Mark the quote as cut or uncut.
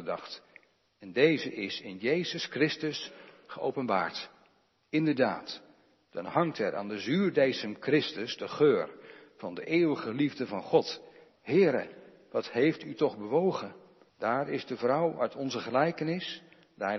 cut